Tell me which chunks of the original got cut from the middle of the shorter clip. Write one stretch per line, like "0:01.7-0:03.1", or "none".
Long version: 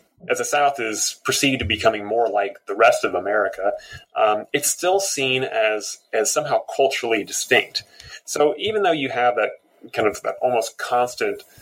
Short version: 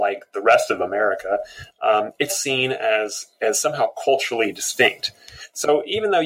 0:04.6-0:05.0